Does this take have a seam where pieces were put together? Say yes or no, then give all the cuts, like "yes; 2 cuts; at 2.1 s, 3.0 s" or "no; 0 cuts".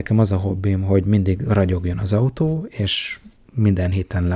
no; 0 cuts